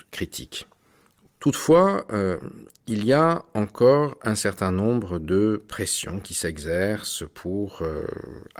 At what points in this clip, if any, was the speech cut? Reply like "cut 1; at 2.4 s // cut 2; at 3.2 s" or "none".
cut 1; at 1.2 s